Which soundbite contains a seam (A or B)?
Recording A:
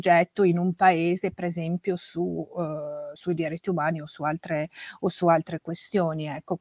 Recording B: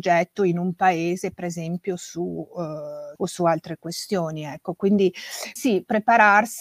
B